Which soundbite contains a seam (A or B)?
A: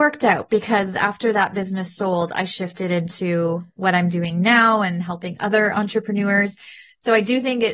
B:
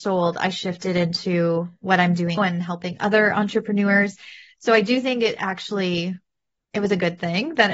B